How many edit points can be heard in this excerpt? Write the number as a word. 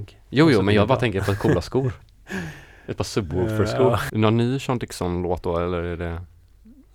one